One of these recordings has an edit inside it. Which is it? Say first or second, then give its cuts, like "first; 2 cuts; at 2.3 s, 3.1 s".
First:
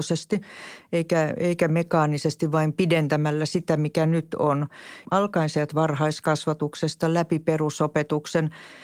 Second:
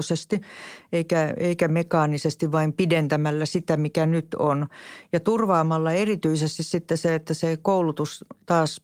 first; 1 cut; at 5.0 s